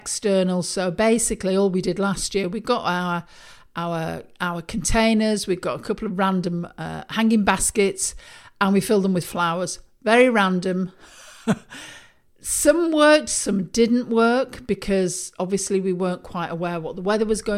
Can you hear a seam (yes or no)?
no